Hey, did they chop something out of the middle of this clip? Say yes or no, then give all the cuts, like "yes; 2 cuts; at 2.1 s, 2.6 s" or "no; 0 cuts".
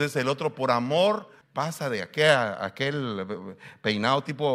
yes; 1 cut; at 1.4 s